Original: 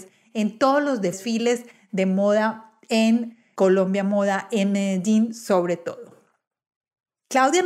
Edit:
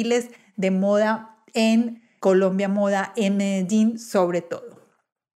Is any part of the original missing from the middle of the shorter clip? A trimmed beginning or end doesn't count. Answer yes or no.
no